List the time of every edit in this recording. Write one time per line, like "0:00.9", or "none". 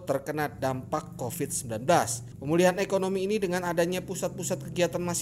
none

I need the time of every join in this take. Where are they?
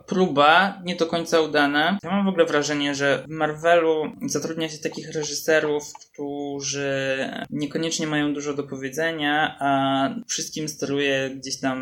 none

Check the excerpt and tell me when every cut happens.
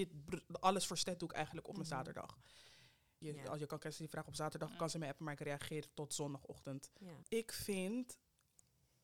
0:03.2
0:07.2

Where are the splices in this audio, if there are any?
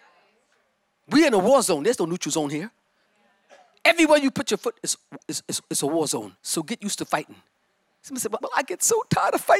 0:06.4
0:08.4

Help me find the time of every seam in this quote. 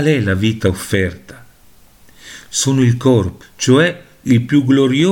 0:03.4

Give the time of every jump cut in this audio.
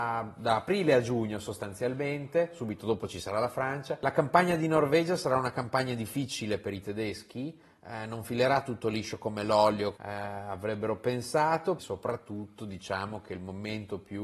0:10.0
0:11.8

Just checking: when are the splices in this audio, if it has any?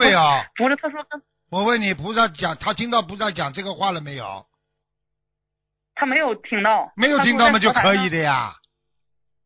none

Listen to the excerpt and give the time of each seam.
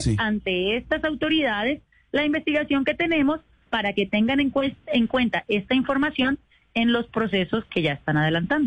none

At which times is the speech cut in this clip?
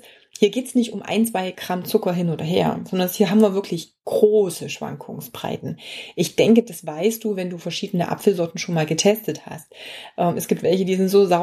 none

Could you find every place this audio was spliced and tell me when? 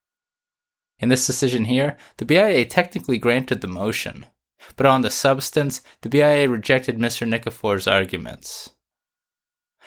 none

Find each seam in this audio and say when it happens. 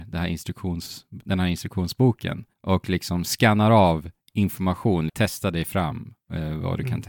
0:02.5
0:05.1

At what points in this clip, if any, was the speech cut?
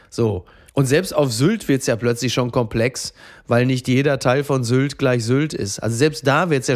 none

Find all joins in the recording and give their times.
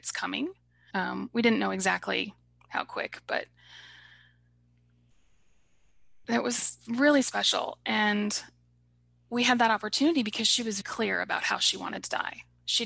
0:00.9
0:10.8

